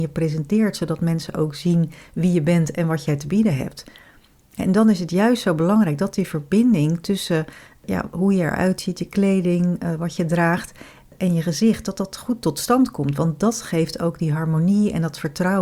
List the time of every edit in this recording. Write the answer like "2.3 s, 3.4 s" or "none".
none